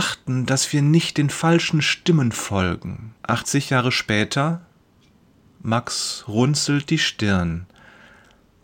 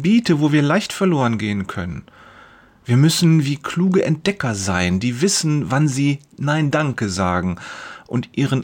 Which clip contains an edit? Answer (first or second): first